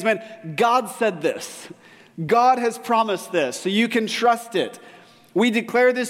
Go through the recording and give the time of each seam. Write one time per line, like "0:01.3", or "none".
none